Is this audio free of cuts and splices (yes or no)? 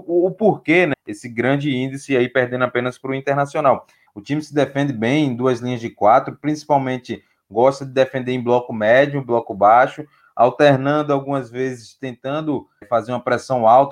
no